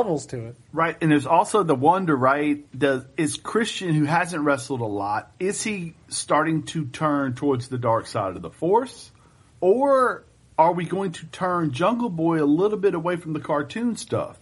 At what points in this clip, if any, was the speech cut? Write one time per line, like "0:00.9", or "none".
0:09.5